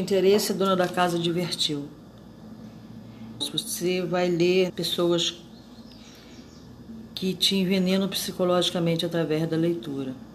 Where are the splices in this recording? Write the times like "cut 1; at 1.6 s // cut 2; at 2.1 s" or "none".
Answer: cut 1; at 3.4 s // cut 2; at 4.7 s